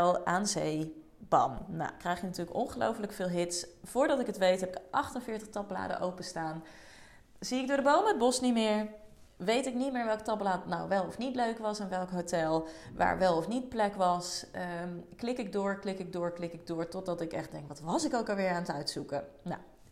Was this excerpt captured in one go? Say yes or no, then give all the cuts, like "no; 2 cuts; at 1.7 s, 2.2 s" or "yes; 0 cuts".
yes; 0 cuts